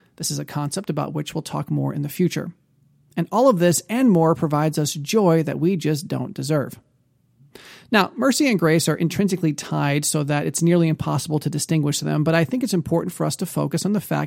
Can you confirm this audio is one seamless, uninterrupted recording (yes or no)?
yes